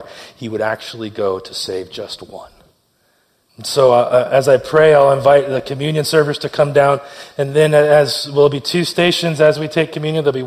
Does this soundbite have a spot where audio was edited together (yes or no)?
yes